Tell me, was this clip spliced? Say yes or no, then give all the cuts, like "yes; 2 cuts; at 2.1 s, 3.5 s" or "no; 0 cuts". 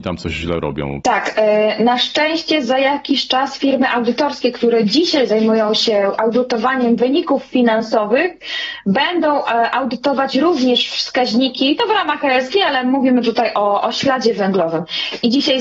yes; 1 cut; at 1.0 s